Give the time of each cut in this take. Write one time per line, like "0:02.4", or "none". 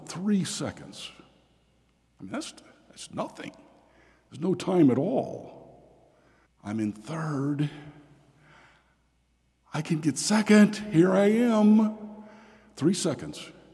0:06.5